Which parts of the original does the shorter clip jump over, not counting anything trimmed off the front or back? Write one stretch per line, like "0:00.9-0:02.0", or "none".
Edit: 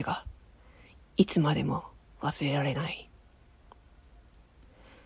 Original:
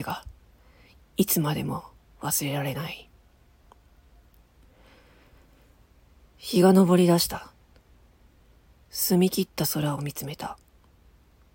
none